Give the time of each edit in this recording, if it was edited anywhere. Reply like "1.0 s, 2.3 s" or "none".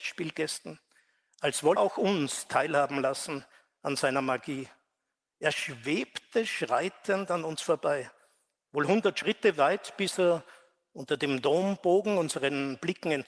1.8 s